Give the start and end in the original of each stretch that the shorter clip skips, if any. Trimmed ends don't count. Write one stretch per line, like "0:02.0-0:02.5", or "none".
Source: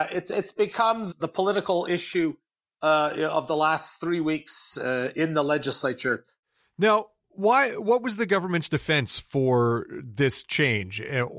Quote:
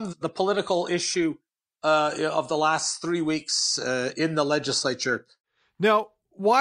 none